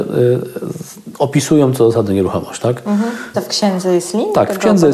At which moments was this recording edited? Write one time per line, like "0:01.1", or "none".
0:03.3